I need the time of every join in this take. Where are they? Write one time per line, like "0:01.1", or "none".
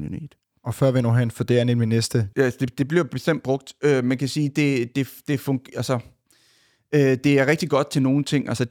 0:02.3